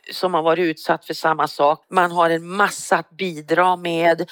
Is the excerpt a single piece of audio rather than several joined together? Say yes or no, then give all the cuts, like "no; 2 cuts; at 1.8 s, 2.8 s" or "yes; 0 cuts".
no; 1 cut; at 1.8 s